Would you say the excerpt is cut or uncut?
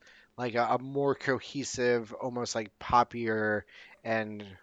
uncut